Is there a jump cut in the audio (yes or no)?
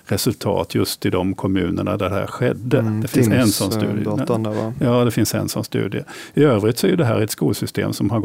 no